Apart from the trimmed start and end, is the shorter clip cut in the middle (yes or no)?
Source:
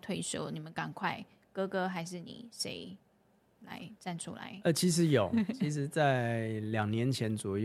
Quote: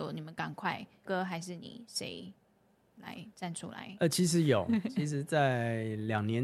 yes